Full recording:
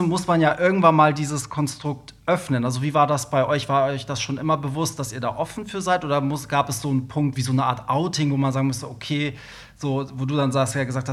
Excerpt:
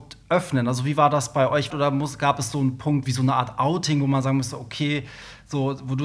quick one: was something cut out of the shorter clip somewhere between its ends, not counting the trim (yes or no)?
yes